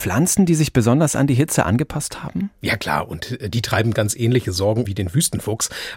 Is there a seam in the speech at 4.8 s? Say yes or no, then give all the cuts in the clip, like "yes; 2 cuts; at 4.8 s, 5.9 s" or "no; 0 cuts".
yes; 1 cut; at 4.8 s